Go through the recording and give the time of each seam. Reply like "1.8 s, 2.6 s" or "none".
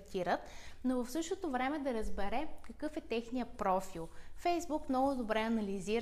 none